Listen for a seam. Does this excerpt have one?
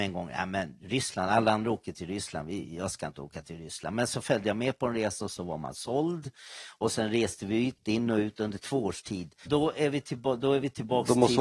yes; 2 cuts; at 7.8 s, 9.4 s

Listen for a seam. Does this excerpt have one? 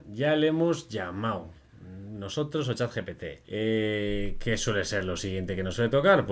yes; 1 cut; at 3.4 s

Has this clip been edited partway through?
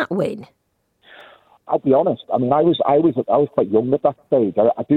no; 0 cuts

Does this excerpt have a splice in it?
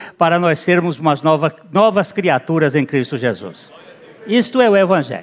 no; 0 cuts

